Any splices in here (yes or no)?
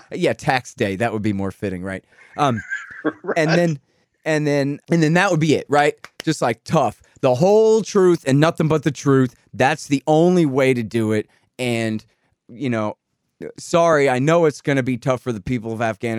yes